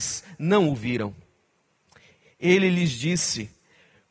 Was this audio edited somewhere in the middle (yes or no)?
no